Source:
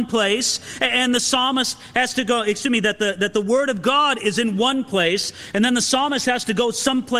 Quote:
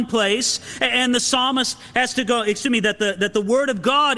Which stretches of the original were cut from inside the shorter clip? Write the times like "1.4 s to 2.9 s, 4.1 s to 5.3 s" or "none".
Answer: none